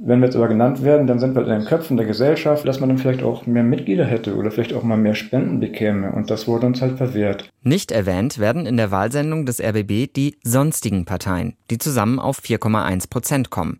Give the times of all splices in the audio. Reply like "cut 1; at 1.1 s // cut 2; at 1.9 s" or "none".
cut 1; at 2.6 s // cut 2; at 7.5 s